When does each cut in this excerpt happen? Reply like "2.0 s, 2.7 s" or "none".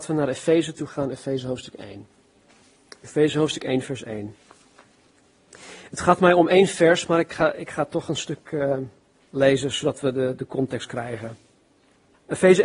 none